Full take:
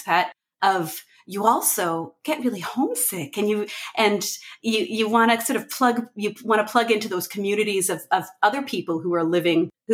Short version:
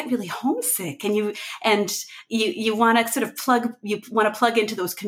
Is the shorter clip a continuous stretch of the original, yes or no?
yes